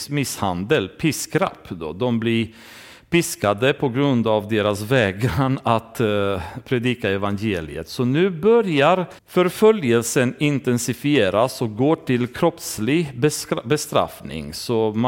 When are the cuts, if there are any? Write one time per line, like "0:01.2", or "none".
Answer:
0:09.2